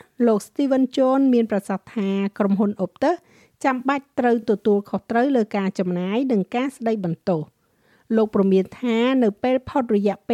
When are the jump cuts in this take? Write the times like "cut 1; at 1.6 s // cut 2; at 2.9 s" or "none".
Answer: none